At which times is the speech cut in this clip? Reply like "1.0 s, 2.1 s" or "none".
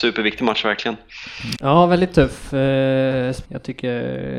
1.5 s, 3.4 s